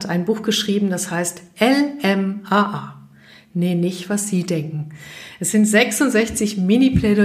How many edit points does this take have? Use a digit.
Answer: 0